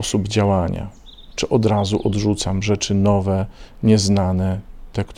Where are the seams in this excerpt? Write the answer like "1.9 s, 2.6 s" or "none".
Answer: none